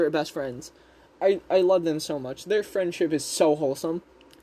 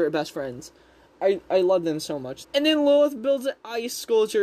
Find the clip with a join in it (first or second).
second